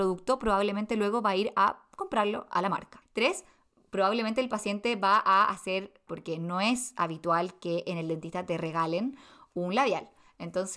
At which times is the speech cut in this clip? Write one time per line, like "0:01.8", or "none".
0:03.0
0:06.1